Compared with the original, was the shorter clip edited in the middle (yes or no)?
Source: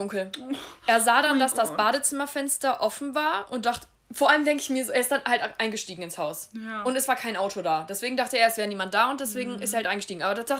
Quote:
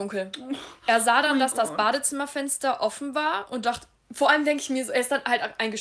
no